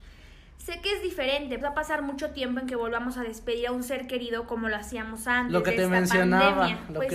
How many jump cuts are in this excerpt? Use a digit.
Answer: 1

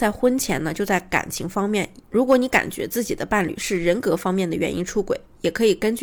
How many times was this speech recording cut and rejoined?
1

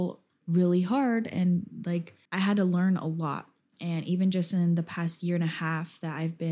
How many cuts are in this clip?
1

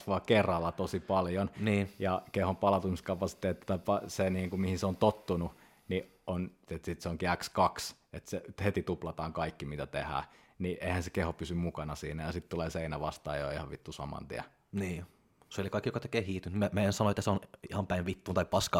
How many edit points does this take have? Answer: 1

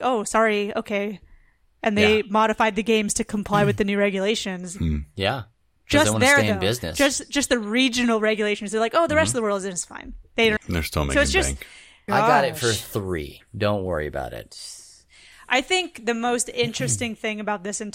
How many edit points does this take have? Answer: 2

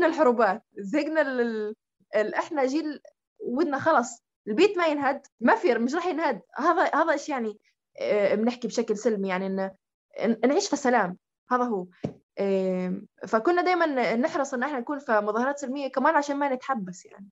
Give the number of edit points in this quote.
1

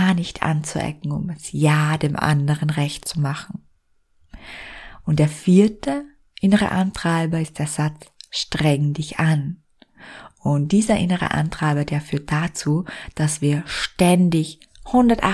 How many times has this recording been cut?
0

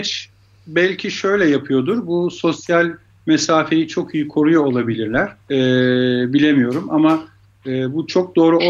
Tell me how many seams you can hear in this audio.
1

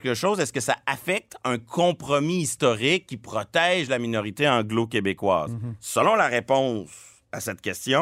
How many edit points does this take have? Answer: 0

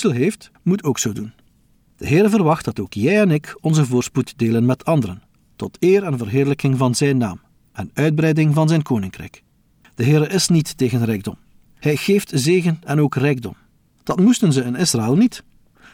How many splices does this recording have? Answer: 1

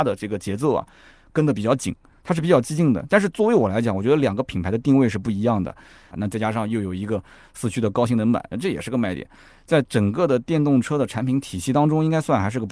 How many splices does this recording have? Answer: 1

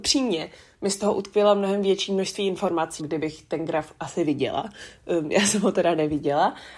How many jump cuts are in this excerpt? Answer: 1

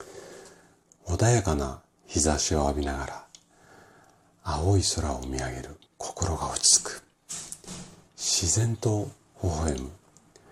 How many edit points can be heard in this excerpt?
2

